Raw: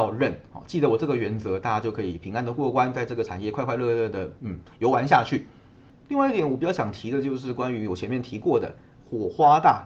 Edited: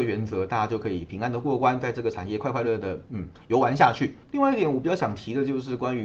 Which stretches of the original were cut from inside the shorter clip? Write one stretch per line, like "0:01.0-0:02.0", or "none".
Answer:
0:03.8-0:04.0
0:05.5-0:06.0